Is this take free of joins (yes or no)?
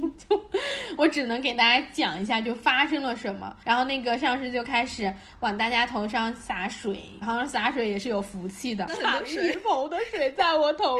no